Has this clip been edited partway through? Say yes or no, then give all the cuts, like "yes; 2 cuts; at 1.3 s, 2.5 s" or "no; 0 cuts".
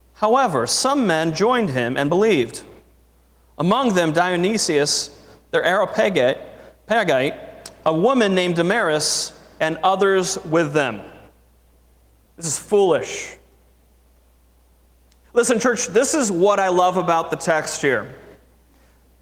yes; 2 cuts; at 12.2 s, 15.2 s